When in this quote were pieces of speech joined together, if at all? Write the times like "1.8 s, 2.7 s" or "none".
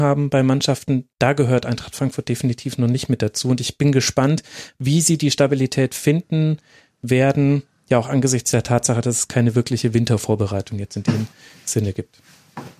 none